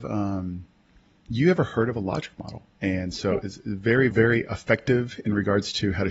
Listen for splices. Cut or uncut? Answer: cut